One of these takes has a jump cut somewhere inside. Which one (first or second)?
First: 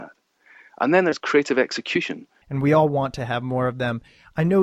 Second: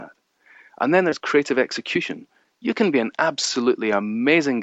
first